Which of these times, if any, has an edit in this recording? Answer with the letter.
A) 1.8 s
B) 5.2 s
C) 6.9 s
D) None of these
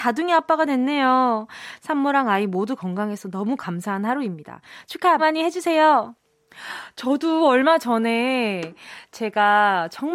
B